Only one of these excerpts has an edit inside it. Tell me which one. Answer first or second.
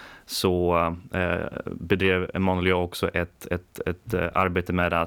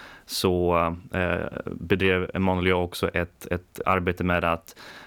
second